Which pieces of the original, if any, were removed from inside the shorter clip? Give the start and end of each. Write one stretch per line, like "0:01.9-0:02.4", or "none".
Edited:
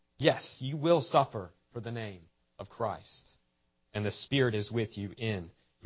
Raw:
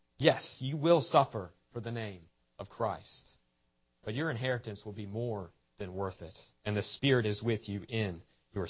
0:03.9-0:06.6